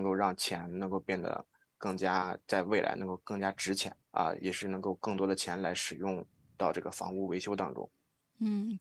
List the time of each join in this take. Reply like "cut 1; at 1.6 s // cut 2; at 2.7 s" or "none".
cut 1; at 4.0 s